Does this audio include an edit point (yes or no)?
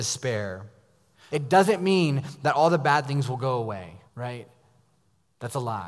yes